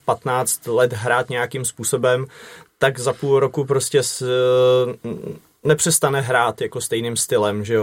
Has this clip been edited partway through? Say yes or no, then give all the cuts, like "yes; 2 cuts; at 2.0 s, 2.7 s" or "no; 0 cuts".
no; 0 cuts